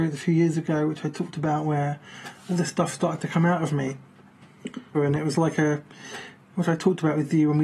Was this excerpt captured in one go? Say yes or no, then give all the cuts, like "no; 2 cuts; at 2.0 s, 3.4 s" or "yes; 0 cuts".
no; 1 cut; at 4.9 s